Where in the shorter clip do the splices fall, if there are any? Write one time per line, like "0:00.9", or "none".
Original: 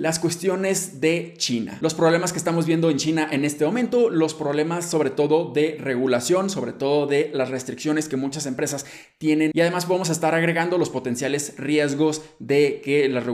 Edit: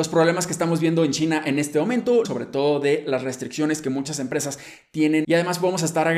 0:02.2